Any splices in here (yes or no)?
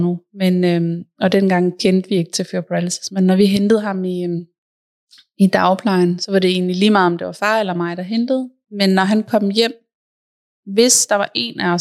no